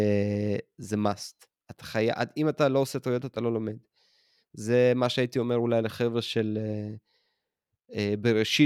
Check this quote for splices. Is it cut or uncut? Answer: uncut